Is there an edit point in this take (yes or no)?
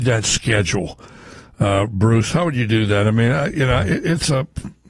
no